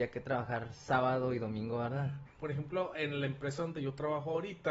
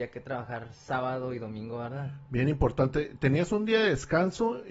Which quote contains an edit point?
first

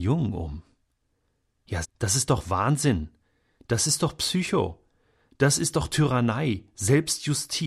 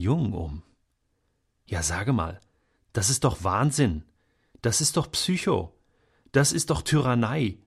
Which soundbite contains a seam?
first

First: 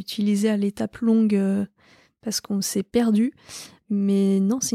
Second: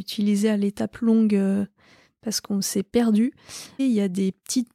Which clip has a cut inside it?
second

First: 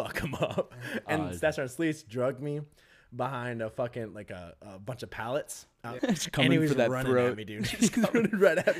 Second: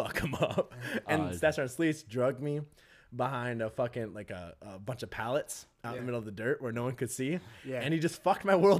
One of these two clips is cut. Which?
first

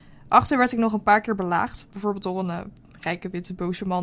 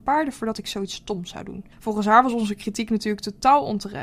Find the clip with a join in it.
second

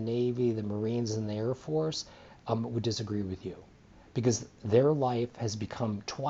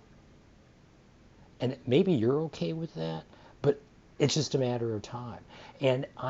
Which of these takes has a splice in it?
second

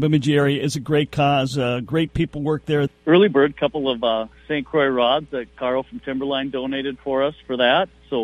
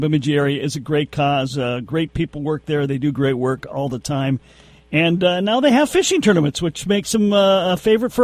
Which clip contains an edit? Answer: first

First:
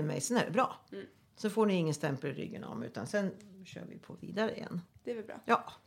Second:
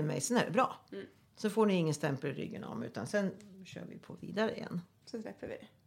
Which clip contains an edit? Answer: first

